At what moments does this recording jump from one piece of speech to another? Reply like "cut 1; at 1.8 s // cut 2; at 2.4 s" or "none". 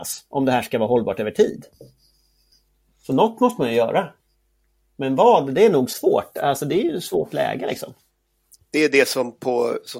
none